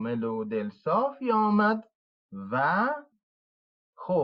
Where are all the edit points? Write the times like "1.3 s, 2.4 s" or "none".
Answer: none